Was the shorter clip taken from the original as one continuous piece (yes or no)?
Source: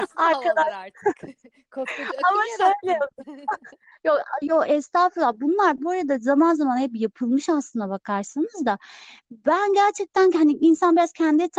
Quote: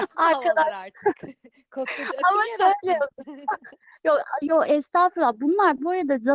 yes